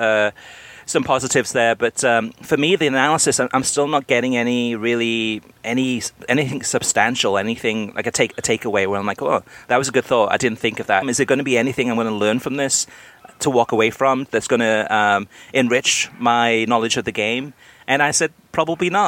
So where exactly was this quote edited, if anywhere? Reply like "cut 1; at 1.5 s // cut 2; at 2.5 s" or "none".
cut 1; at 11.0 s